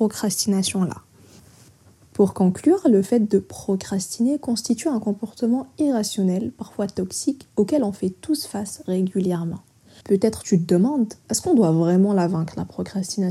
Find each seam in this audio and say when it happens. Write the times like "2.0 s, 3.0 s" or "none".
10.0 s, 11.2 s